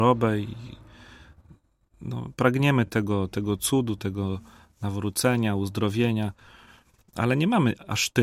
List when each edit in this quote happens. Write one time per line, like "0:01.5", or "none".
none